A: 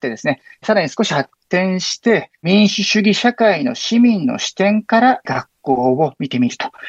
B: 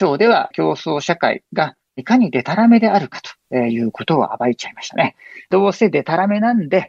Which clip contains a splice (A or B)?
A